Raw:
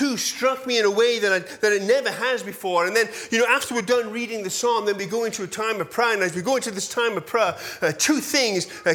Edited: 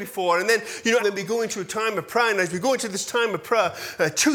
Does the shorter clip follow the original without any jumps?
no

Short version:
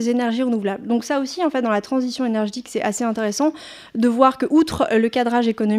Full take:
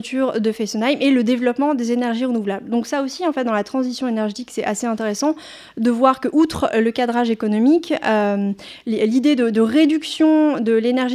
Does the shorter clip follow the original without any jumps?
yes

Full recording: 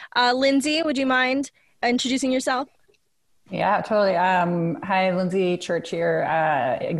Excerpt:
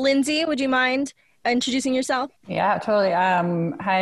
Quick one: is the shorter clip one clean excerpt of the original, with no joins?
no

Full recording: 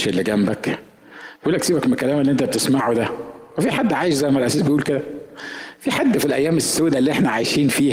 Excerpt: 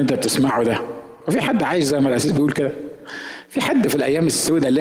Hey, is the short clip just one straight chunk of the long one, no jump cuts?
yes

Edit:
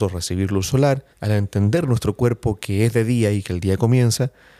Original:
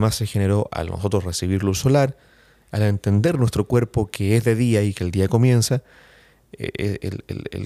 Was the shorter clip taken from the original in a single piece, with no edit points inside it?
no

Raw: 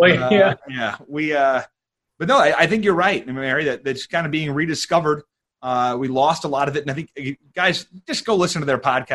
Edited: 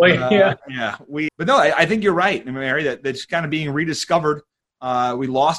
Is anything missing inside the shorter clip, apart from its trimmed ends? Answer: yes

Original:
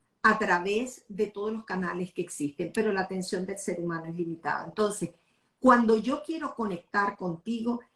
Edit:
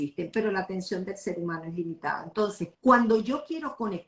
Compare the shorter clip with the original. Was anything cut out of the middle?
yes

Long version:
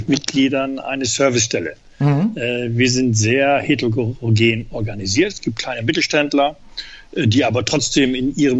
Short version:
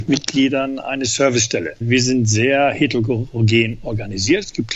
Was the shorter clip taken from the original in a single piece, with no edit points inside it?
no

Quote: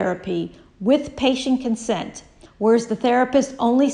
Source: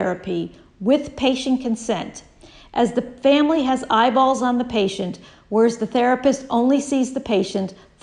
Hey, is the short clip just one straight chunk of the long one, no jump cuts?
no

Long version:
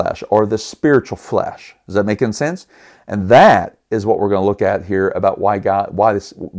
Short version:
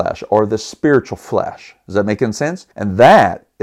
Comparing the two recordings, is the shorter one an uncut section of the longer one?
no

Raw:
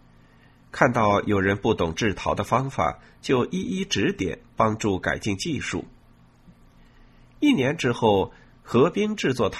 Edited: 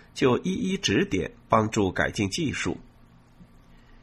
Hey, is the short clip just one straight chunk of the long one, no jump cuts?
yes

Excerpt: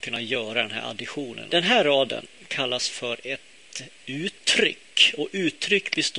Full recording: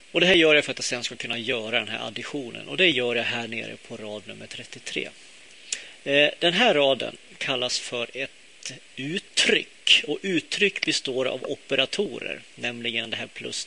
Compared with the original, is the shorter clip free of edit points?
no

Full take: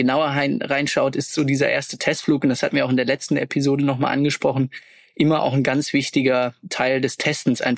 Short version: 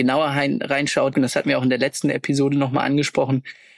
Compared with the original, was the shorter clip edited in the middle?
yes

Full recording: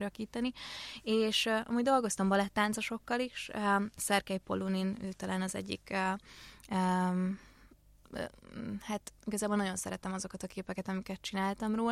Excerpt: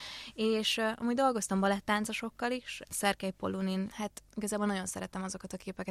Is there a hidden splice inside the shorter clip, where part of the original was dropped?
yes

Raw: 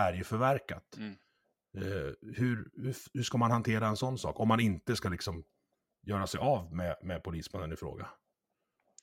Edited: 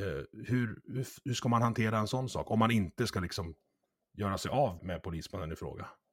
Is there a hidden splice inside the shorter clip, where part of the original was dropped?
yes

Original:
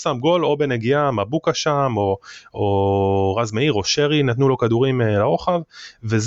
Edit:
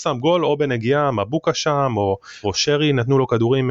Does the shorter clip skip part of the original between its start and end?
yes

